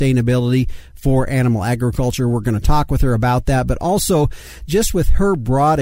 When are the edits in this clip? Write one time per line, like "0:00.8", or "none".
none